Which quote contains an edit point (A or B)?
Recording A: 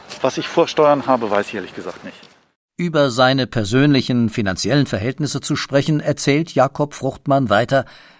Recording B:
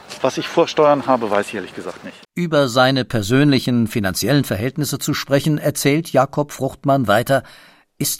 B